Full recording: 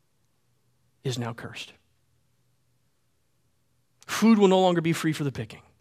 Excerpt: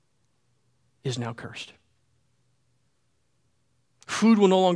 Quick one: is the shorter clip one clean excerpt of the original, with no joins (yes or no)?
yes